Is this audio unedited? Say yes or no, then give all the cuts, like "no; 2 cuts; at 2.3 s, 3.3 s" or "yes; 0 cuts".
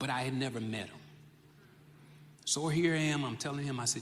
no; 1 cut; at 2.3 s